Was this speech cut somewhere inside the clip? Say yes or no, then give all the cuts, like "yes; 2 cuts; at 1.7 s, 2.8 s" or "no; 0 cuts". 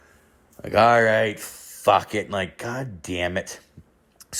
no; 0 cuts